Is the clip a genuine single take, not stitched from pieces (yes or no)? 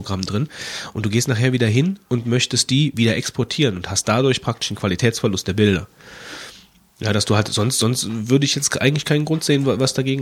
yes